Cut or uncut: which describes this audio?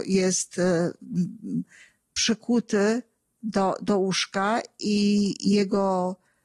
uncut